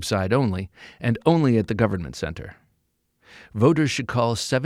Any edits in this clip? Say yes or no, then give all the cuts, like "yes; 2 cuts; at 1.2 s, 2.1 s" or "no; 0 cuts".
no; 0 cuts